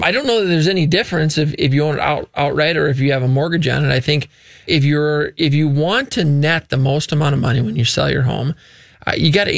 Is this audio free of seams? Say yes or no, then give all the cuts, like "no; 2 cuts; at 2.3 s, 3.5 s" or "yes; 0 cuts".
no; 1 cut; at 4.7 s